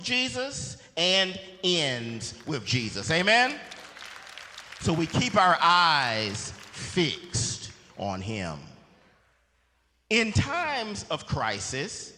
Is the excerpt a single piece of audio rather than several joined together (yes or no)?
yes